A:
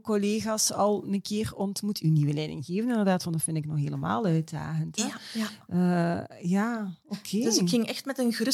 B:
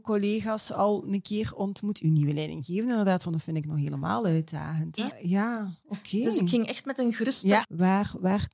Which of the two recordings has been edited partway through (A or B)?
B